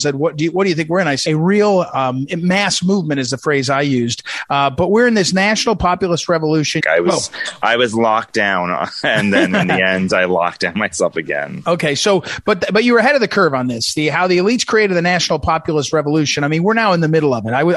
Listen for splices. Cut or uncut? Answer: cut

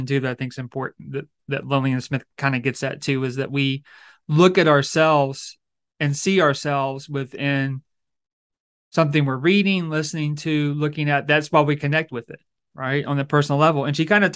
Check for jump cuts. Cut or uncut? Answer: uncut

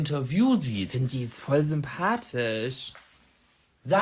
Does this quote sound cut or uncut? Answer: uncut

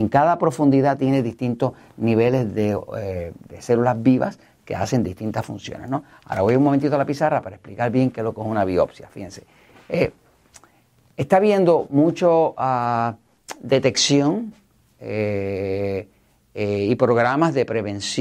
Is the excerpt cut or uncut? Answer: uncut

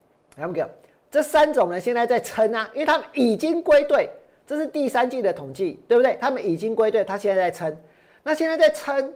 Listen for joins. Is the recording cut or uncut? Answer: uncut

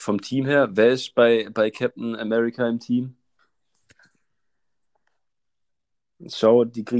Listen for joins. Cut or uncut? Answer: uncut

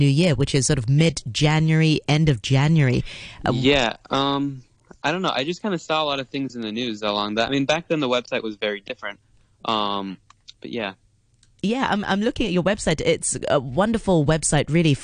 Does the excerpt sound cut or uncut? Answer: uncut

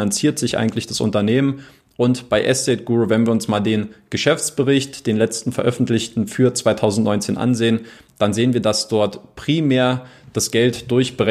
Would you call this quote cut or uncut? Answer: uncut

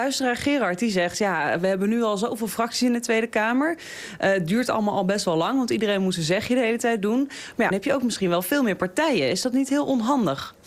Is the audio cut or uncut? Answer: cut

